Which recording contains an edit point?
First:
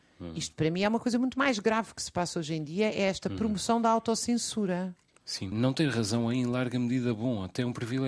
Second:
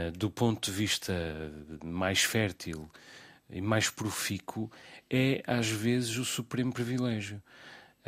first; 1 cut; at 5.5 s

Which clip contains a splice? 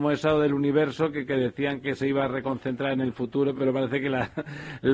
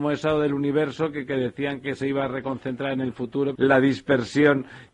second; 1 cut; at 3.6 s

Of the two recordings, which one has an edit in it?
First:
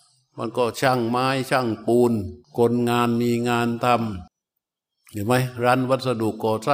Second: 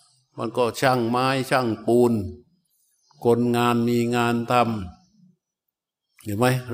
first; 2 cuts; at 2.4 s, 4.3 s

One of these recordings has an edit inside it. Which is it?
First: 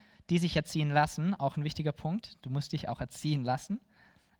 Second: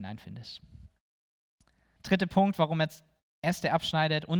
second; 1 cut; at 2.0 s

